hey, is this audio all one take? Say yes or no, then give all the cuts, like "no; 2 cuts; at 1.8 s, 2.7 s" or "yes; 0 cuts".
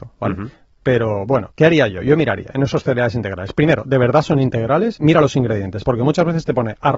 yes; 0 cuts